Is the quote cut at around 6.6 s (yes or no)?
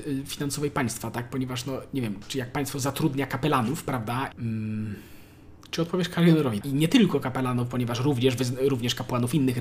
yes